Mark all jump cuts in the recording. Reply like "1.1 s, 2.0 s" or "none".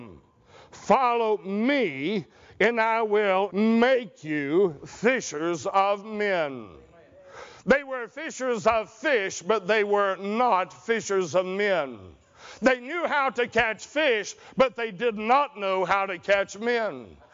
3.5 s